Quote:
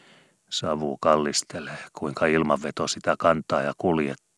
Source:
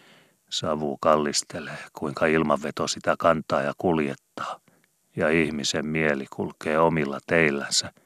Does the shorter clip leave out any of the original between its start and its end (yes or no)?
no